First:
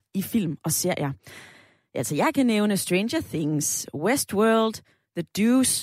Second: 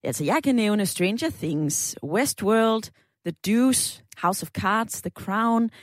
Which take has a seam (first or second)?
second